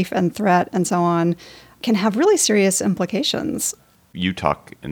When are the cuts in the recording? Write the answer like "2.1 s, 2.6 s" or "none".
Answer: none